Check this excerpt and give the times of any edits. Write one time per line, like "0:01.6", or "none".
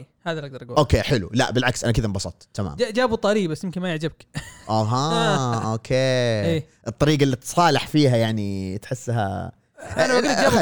none